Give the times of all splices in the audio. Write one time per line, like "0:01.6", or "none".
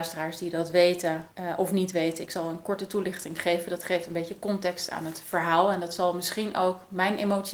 0:01.3